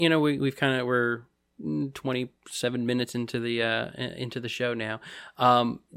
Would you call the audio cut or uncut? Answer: uncut